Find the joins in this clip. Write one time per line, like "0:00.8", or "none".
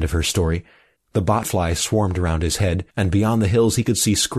0:00.9
0:02.9